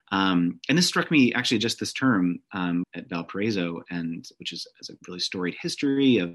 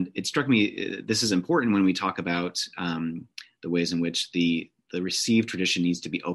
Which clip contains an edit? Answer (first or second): first